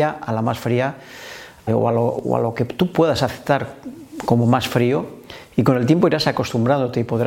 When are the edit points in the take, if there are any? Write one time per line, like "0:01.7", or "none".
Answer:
0:01.7